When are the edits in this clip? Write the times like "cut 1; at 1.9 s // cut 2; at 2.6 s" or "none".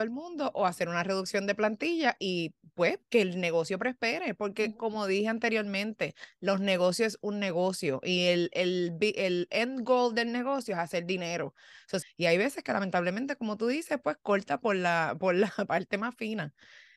cut 1; at 12.0 s